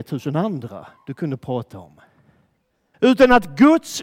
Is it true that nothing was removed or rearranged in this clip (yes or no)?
no